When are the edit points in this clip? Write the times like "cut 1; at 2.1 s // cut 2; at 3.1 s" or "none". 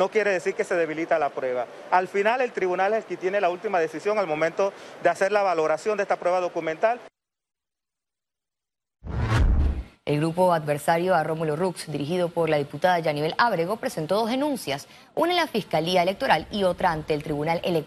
cut 1; at 9.9 s